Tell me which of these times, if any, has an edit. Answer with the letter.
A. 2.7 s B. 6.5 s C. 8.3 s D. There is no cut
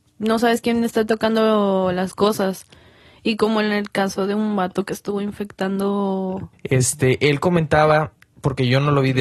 B